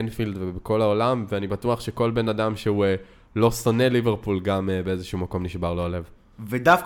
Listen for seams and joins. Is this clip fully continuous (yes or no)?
yes